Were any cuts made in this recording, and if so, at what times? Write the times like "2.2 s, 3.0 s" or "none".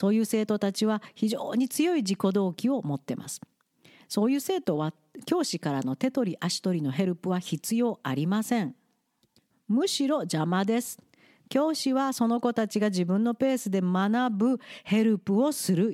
none